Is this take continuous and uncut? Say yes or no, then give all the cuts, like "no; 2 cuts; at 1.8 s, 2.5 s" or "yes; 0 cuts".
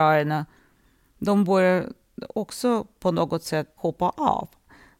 no; 1 cut; at 3.8 s